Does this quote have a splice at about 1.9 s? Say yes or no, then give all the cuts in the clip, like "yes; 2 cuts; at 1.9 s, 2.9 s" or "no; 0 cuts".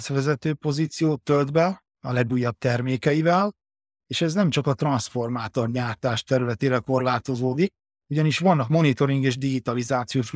yes; 1 cut; at 1.9 s